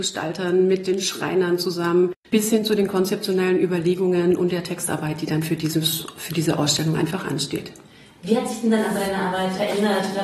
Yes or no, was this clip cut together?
no